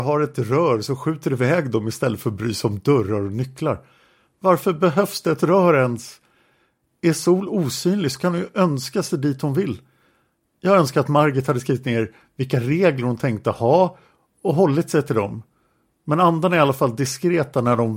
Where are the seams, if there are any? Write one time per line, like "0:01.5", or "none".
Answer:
none